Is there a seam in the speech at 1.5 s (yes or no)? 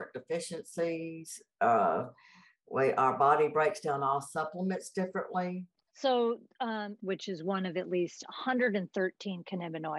no